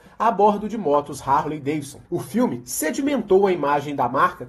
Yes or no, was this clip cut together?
yes